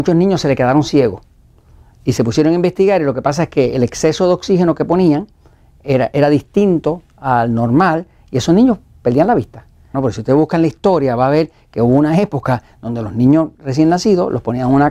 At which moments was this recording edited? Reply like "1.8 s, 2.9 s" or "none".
9.9 s